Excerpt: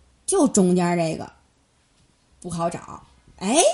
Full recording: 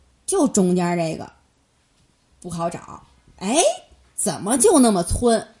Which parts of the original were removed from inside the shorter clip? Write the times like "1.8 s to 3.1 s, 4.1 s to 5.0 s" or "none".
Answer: none